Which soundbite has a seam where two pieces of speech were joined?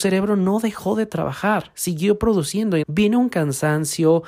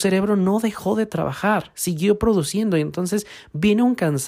first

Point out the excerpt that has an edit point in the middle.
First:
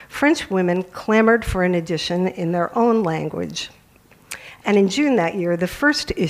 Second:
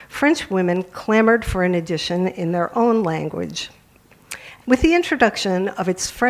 second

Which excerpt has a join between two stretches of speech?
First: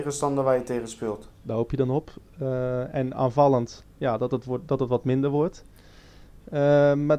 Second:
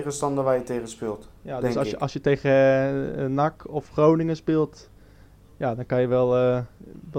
first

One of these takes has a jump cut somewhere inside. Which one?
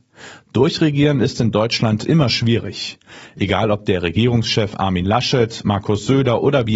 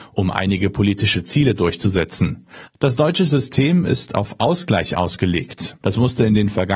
second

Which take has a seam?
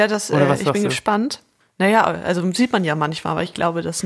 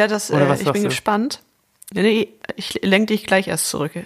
first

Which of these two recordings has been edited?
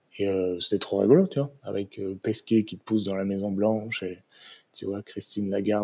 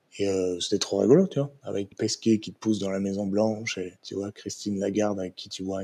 second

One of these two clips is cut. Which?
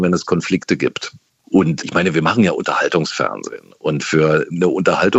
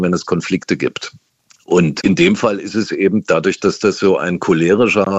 first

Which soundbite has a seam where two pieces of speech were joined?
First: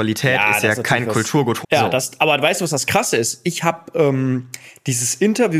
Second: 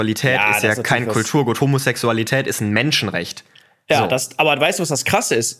first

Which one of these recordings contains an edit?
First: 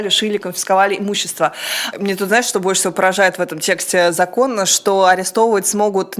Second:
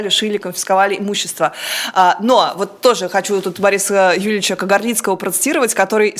first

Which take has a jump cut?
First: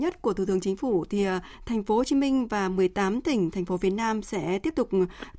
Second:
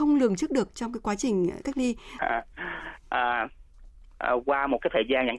second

